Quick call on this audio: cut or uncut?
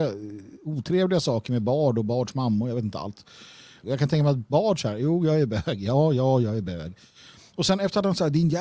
cut